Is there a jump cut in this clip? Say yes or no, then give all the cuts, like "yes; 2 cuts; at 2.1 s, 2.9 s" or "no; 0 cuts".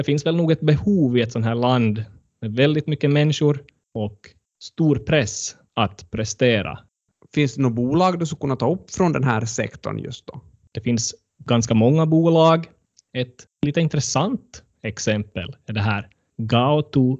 no; 0 cuts